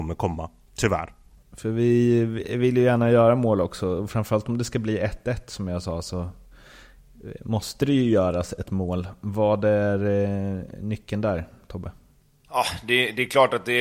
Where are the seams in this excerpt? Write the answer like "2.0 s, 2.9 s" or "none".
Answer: 1.4 s